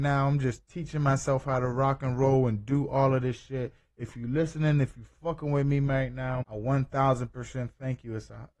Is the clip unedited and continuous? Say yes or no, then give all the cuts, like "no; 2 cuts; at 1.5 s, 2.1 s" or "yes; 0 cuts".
no; 1 cut; at 6.4 s